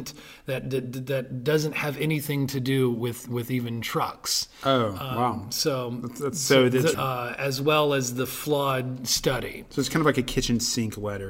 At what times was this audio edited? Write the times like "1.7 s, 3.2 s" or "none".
6.9 s